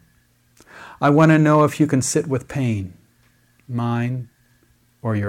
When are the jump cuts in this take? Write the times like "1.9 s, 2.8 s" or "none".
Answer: none